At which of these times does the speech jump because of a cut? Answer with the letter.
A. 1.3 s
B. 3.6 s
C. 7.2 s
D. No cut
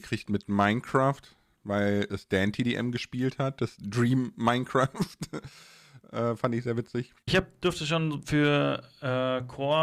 C